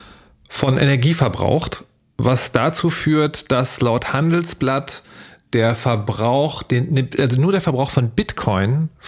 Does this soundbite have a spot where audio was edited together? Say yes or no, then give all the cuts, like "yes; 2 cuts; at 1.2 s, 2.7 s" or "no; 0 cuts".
no; 0 cuts